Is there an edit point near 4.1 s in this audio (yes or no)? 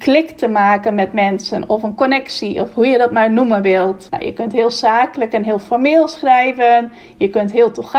yes